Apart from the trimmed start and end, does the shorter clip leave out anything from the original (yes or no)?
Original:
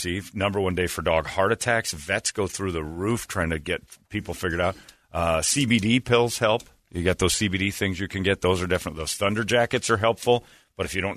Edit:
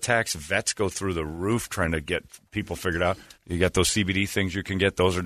yes